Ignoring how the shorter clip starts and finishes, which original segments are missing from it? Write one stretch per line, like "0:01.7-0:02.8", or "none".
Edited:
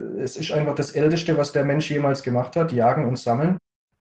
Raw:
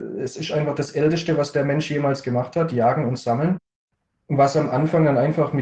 none